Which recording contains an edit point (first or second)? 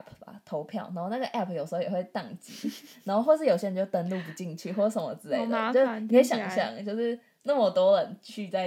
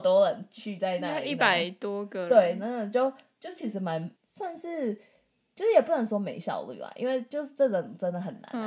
second